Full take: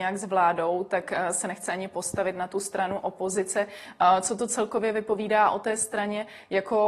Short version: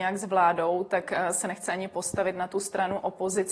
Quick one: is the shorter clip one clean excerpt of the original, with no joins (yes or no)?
yes